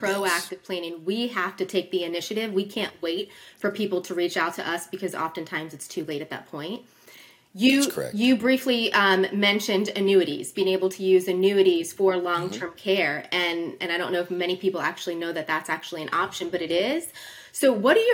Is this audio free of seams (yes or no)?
yes